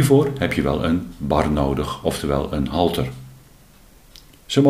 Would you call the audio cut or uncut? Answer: uncut